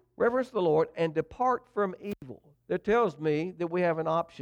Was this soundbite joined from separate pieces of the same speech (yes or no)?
no